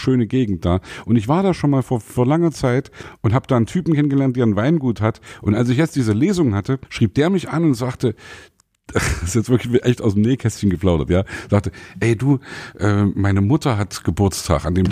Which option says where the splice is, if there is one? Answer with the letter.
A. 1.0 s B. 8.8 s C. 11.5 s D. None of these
D